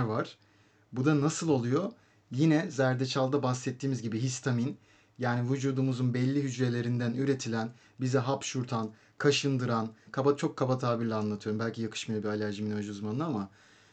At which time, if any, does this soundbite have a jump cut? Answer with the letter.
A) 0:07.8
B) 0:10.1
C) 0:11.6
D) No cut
B